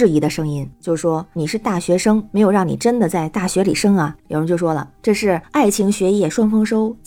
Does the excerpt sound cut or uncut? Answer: cut